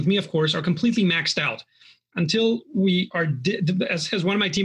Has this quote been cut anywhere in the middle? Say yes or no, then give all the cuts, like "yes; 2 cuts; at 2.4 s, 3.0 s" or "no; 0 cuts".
no; 0 cuts